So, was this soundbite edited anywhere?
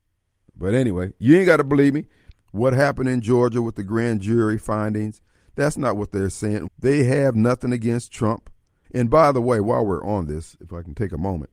yes; 3 cuts; at 2.3 s, 6.7 s, 8.8 s

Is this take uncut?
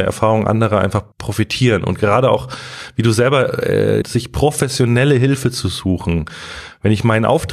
no; 2 cuts; at 1.1 s, 4.0 s

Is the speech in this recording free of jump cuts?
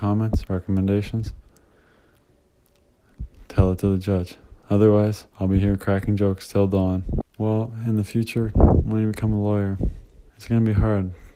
no; 3 cuts; at 5.3 s, 7.2 s, 10.3 s

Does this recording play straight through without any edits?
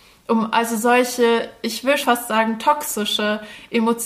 no; 1 cut; at 2.0 s

